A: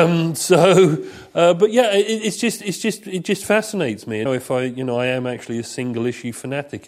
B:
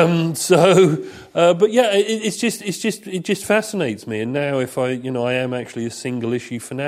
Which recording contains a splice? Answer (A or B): A